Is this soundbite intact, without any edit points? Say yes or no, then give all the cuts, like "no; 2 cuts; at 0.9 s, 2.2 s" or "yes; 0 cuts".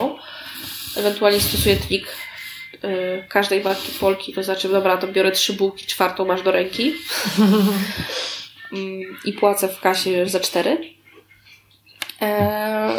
yes; 0 cuts